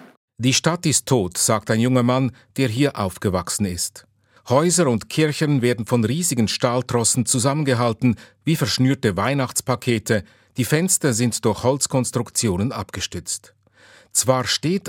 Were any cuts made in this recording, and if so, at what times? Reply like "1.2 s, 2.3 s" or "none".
4.4 s